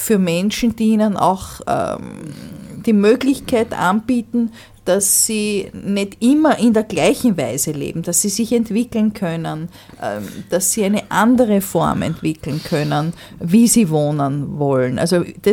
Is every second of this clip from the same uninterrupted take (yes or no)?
yes